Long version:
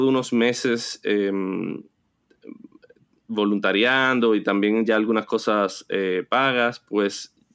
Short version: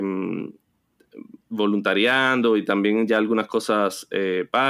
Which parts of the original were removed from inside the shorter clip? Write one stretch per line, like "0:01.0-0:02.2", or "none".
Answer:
0:02.7-0:03.2